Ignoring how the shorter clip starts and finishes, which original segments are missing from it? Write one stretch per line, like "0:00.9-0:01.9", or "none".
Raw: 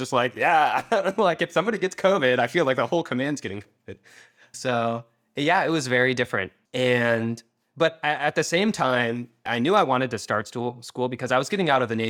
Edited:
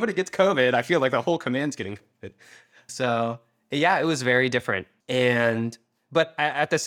none

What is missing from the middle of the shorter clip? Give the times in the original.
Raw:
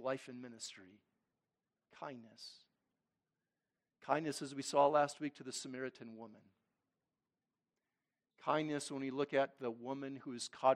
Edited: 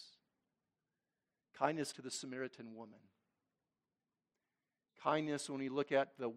0:04.4-0:05.3

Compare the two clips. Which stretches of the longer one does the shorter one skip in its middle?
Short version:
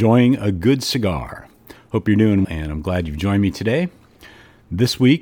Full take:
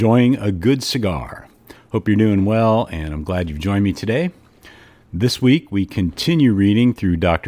0:02.4-0:02.9

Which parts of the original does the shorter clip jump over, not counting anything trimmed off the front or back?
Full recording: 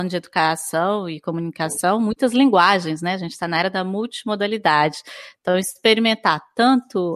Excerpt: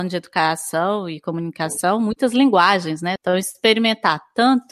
0:03.2-0:05.4

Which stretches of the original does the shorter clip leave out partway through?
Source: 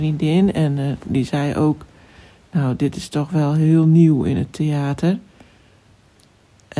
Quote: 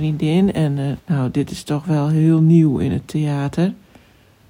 0:01.0-0:02.4

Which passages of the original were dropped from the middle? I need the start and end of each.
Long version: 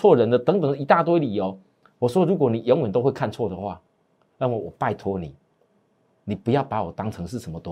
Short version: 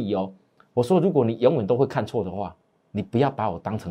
0:04.1-0:06.2

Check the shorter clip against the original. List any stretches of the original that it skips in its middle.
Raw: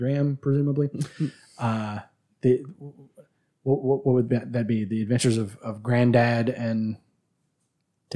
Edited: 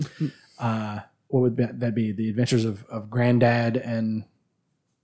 0:02.3-0:04.0

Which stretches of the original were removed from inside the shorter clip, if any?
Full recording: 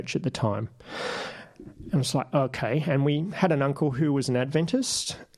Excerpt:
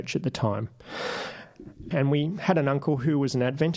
0:01.9-0:02.8

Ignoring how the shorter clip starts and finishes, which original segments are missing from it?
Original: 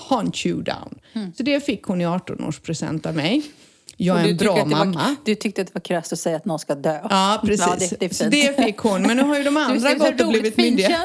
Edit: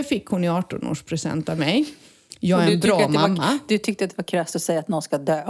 none

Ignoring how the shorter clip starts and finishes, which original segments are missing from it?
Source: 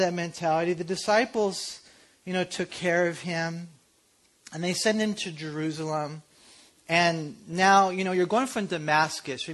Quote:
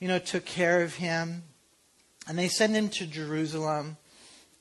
none

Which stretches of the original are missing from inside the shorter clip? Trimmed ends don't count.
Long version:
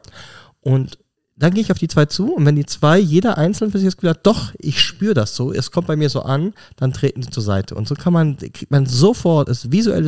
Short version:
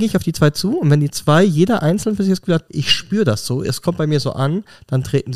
0:04.2-0:04.6

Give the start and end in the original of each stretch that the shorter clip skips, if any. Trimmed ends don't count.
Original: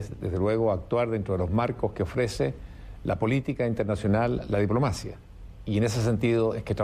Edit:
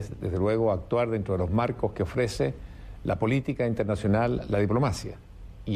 none

